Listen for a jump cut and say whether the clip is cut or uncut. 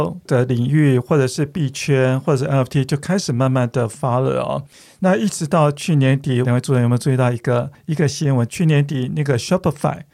cut